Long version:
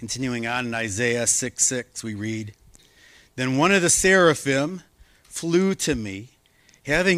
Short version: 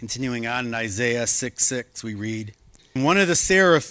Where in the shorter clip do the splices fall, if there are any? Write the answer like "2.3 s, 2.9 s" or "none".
3.0 s